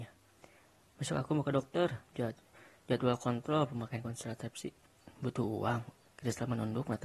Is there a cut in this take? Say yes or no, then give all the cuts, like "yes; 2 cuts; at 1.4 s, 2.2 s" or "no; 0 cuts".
yes; 1 cut; at 6.1 s